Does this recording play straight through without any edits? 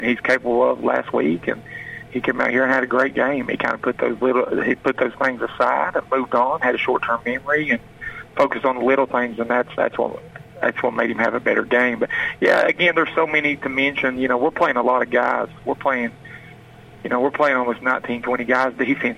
yes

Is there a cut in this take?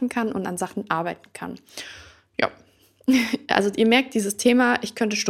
no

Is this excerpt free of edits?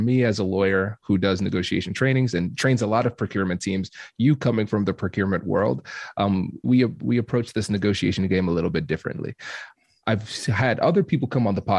no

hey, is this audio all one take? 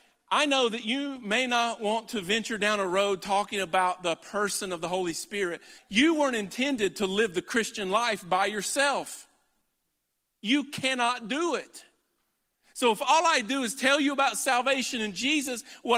no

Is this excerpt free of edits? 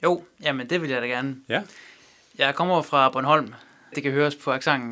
no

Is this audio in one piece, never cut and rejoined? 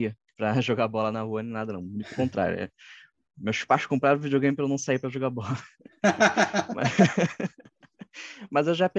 yes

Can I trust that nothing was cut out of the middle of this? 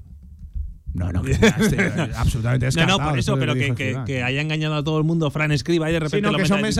yes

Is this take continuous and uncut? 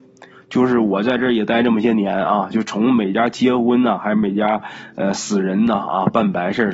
yes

